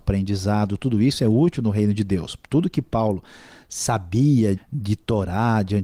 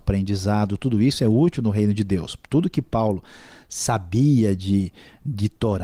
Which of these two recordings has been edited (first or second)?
first